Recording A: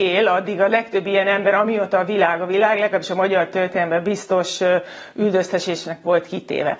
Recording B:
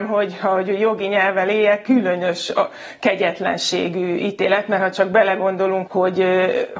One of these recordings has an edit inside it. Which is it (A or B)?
B